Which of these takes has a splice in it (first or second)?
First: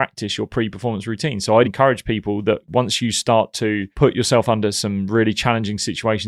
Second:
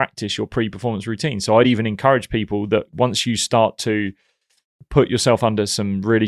first